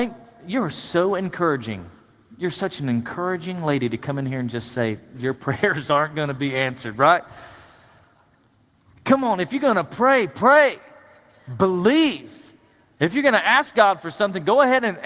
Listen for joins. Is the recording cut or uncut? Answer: uncut